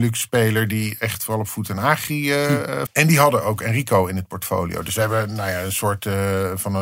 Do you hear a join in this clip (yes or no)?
yes